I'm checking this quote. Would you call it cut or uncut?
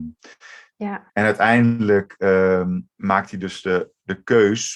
cut